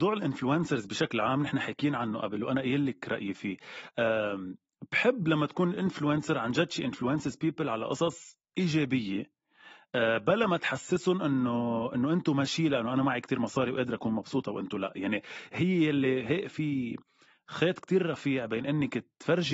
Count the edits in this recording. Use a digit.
1